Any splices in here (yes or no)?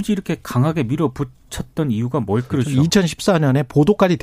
yes